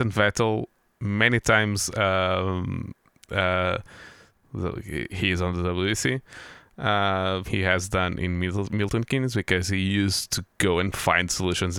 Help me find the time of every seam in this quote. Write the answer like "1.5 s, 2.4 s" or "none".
4.4 s, 7.4 s